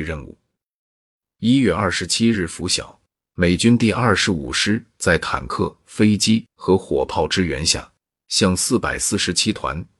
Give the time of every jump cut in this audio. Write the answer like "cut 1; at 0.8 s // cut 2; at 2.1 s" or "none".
none